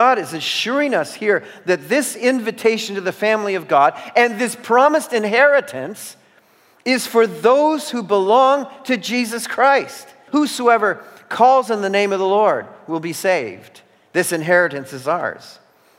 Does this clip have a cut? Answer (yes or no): yes